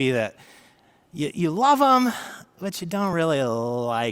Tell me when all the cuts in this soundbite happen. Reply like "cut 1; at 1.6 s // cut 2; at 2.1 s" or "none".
none

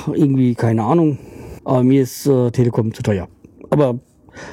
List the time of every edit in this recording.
cut 1; at 1.6 s

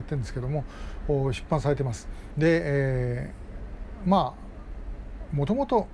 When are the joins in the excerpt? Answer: cut 1; at 2.3 s

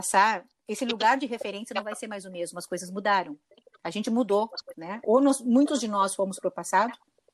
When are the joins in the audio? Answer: cut 1; at 4.7 s

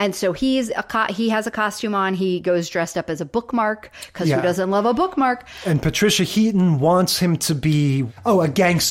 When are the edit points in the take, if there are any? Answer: none

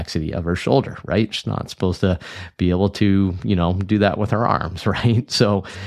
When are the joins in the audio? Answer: cut 1; at 1.3 s

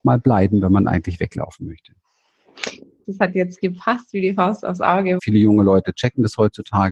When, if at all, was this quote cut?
cut 1; at 3.0 s // cut 2; at 5.2 s

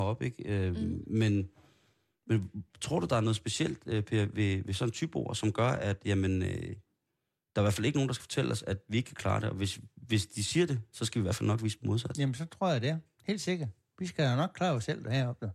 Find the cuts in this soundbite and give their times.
none

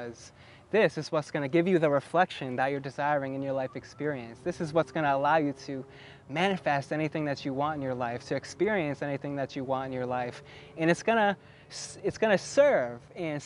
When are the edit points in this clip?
none

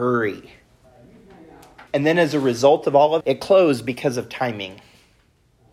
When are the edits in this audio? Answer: cut 1; at 1.9 s // cut 2; at 3.2 s

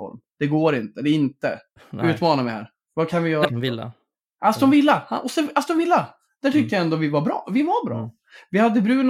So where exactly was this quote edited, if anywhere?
cut 1; at 1.8 s // cut 2; at 3.5 s

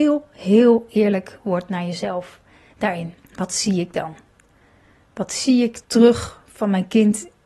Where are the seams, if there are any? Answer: cut 1; at 3.2 s // cut 2; at 5.8 s

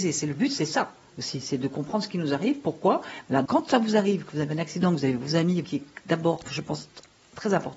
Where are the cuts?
cut 1; at 3.4 s // cut 2; at 5.6 s

